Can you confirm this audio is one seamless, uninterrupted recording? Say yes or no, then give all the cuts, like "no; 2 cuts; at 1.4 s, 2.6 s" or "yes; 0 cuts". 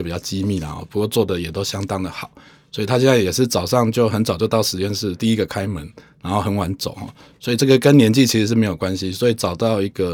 yes; 0 cuts